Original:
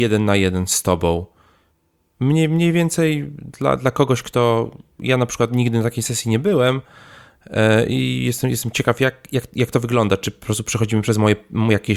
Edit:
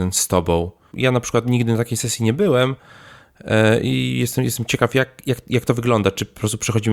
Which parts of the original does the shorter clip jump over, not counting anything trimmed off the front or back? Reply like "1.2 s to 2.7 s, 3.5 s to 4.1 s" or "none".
1.5 s to 5.0 s